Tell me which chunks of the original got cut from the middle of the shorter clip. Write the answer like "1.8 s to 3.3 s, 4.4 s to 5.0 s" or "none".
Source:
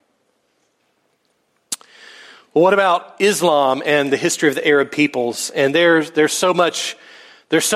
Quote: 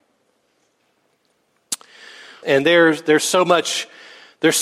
2.4 s to 5.5 s